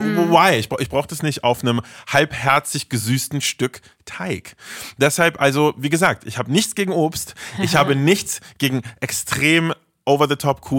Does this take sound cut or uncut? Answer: uncut